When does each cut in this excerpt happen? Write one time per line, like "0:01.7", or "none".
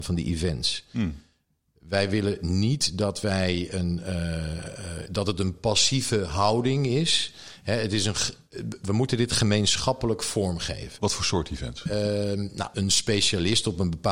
0:05.1
0:11.0
0:12.7